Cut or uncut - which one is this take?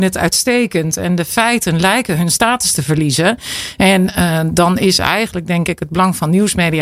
uncut